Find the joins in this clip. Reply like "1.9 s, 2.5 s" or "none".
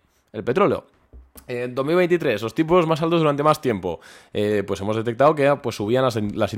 none